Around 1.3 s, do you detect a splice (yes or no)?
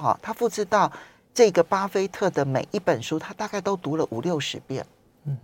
no